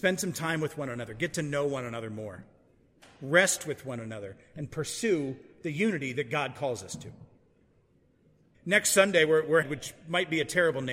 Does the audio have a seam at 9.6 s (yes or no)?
yes